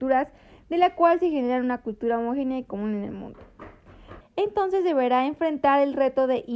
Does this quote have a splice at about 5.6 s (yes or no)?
no